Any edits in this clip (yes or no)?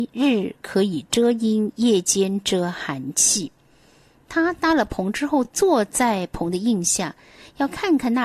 no